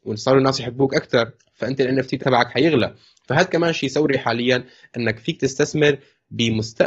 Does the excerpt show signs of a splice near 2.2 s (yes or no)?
yes